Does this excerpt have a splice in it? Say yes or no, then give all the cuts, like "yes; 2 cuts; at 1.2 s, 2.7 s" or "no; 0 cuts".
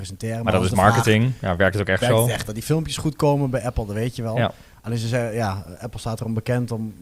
no; 0 cuts